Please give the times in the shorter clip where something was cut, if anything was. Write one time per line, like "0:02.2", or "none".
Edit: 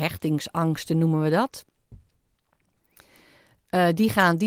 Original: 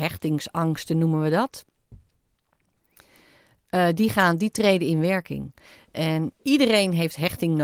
none